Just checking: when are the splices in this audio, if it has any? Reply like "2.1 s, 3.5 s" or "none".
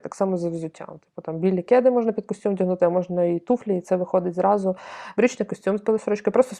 5.1 s